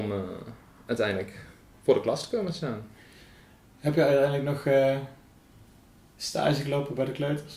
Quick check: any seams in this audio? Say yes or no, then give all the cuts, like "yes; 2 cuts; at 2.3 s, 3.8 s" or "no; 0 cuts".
no; 0 cuts